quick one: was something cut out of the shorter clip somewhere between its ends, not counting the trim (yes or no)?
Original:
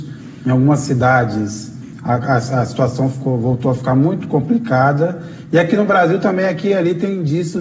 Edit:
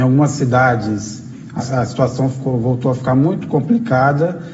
yes